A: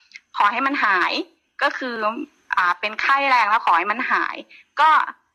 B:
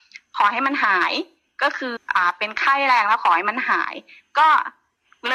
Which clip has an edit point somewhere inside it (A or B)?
B